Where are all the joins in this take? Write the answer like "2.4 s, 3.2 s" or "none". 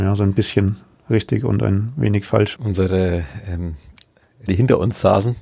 2.6 s, 4.5 s